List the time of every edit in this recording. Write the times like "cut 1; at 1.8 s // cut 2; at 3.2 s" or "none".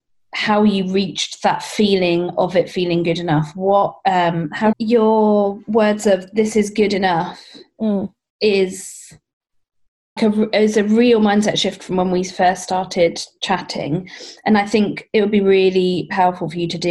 cut 1; at 4.7 s // cut 2; at 10.2 s